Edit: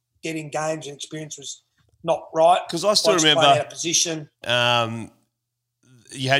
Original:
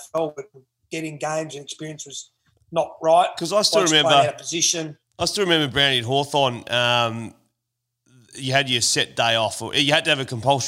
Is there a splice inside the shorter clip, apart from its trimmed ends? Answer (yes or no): yes